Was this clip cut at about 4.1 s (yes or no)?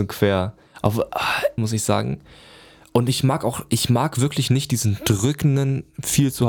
no